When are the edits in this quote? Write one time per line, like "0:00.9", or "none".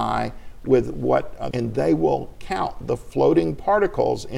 0:01.5